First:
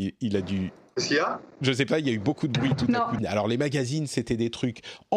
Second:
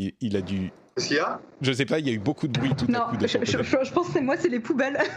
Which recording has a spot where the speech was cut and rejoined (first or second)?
first